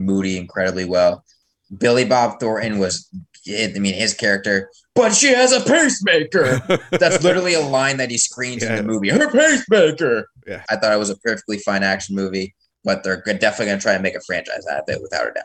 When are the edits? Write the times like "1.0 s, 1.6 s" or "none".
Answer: 10.7 s